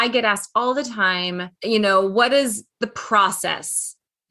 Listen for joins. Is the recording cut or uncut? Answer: cut